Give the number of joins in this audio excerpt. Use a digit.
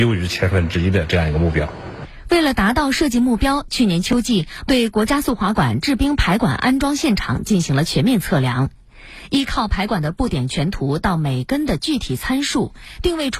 1